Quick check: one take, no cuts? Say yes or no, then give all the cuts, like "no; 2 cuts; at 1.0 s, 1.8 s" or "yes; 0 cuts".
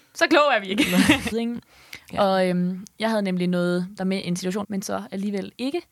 no; 2 cuts; at 1.3 s, 4.6 s